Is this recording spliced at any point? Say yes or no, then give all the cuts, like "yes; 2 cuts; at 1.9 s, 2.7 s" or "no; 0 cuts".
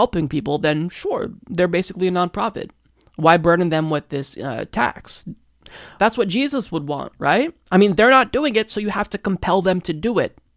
yes; 1 cut; at 6.0 s